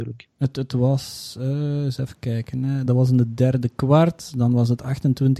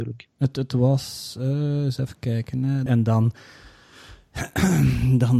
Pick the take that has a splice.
second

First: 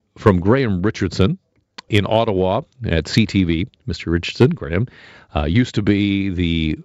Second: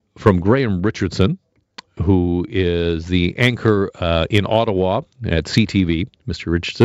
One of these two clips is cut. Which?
first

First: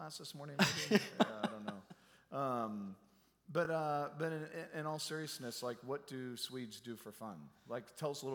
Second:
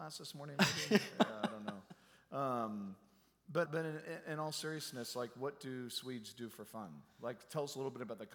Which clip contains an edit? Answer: second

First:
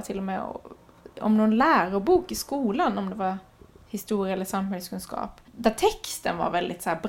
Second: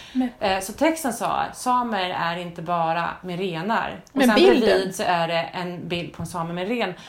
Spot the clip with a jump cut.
first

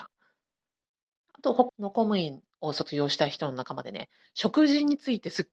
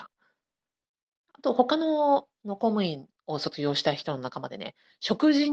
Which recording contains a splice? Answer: first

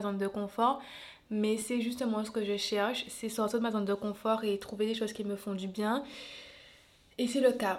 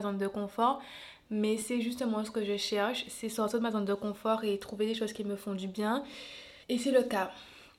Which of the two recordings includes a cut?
second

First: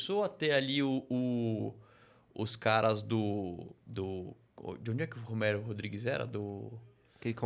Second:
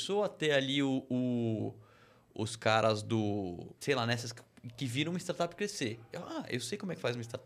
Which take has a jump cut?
second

